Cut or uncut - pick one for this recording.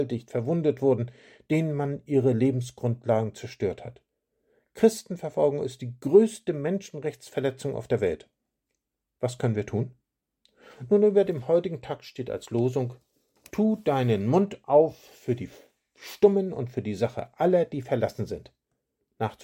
uncut